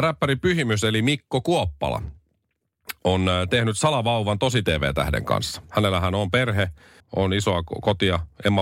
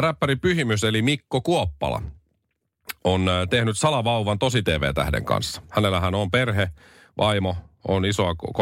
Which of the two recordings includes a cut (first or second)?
first